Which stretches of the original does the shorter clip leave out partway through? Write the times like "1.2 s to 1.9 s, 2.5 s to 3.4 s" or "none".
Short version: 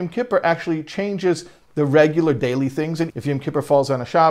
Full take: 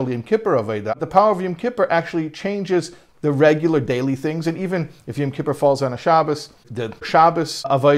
4.6 s to 5.0 s

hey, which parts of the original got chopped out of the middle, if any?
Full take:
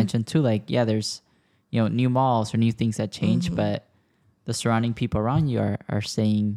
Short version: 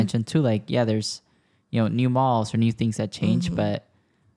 none

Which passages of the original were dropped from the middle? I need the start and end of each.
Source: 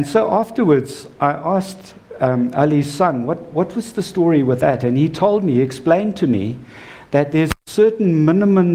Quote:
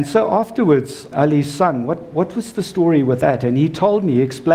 1.1 s to 2.5 s

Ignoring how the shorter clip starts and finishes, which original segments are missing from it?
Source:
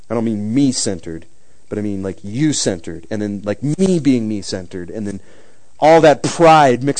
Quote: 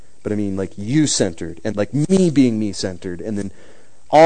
3.2 s to 3.4 s

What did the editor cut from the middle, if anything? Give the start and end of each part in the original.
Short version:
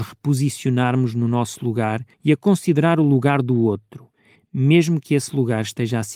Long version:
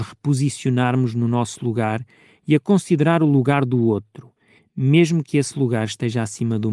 2.1 s to 2.4 s

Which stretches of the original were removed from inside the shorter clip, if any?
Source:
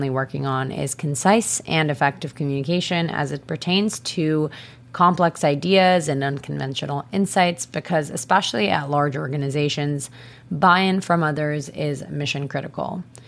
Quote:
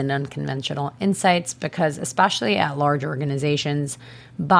none

